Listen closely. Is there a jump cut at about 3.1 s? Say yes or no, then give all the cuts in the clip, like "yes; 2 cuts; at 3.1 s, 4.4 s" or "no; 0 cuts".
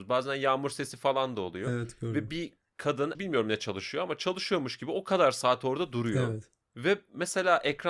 yes; 1 cut; at 3.1 s